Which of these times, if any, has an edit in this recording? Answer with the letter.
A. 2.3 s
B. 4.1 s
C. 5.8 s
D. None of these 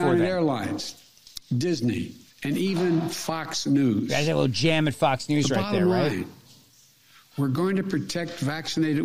A